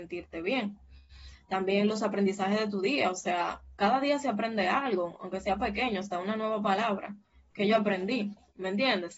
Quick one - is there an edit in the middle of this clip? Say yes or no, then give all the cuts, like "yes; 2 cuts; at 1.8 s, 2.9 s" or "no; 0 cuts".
no; 0 cuts